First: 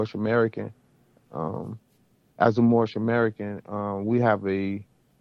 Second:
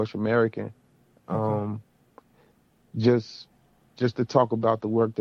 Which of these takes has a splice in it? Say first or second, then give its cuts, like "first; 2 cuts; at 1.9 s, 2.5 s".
first; 1 cut; at 1.2 s